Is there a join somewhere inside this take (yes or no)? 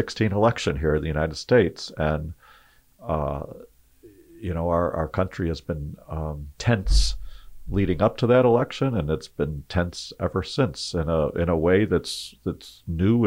no